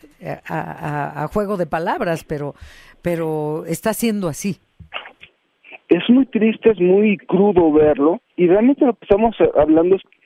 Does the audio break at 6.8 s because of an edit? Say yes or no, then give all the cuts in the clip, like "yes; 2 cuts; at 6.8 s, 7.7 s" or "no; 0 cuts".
no; 1 cut; at 8.3 s